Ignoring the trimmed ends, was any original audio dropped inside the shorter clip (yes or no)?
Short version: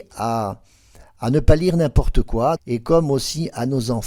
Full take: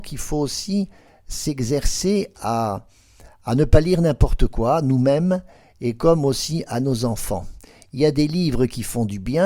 yes